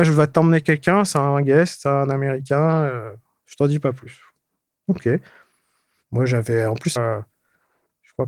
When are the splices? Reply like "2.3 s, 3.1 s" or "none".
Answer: 7.0 s